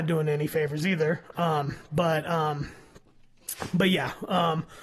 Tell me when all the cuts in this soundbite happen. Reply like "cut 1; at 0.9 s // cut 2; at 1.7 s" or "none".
cut 1; at 1.3 s